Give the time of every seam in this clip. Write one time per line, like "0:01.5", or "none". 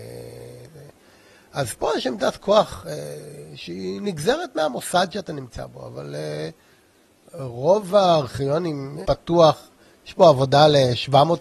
0:09.1

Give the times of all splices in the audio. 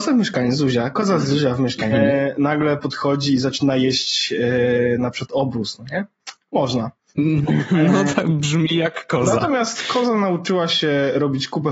0:01.9

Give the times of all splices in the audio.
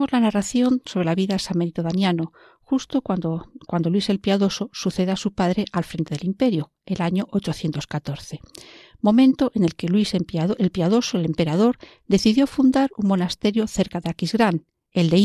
none

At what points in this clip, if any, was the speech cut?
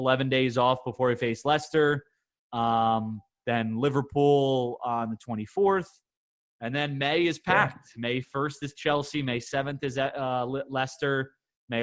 none

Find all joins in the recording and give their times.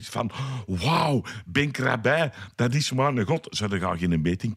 none

